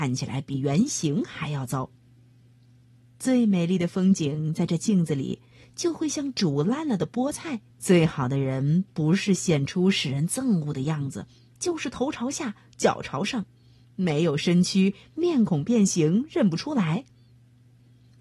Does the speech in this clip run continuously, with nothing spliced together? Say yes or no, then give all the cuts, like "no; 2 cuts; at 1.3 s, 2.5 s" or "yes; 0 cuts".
no; 1 cut; at 7.7 s